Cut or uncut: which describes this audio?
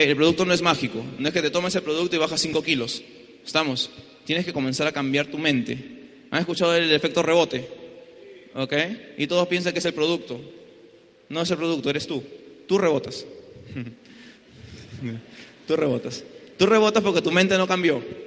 uncut